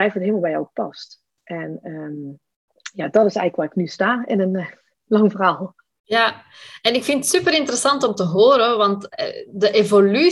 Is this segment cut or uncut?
uncut